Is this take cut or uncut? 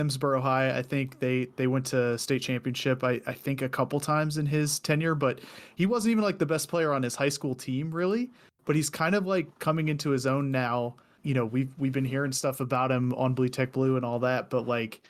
uncut